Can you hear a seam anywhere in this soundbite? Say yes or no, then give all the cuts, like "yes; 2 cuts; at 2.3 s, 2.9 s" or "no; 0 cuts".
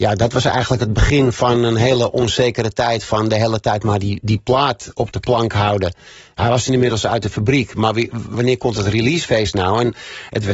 yes; 1 cut; at 8.3 s